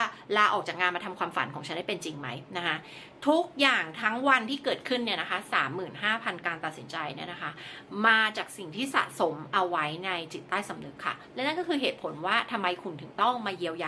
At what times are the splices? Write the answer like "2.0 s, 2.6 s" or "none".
none